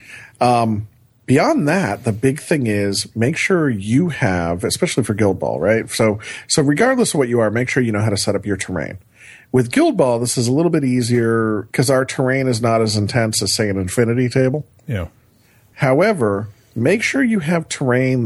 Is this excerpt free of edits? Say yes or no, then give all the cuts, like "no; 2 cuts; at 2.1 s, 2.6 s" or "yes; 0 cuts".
no; 1 cut; at 11.7 s